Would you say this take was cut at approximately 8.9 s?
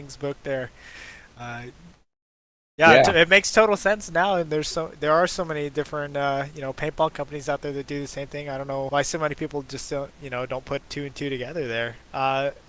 yes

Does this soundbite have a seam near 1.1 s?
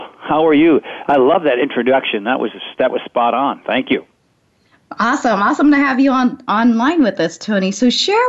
no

